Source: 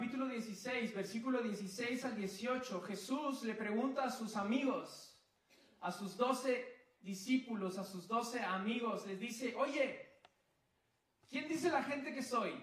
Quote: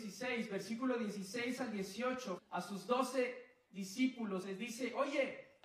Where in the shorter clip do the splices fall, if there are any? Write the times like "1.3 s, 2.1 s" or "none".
2.4 s, 4.4 s